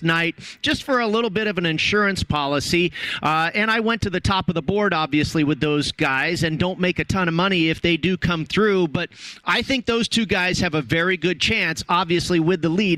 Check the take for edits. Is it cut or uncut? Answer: uncut